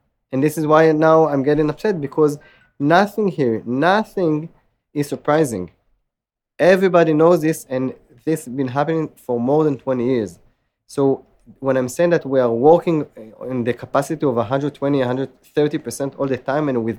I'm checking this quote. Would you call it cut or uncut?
uncut